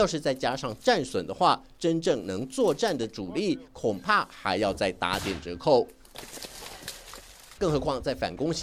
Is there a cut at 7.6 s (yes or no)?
yes